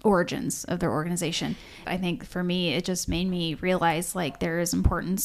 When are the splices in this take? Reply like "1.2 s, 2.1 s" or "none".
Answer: 1.8 s

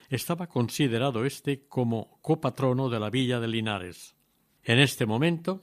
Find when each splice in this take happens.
4.6 s

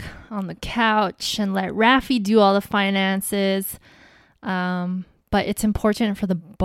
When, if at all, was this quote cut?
none

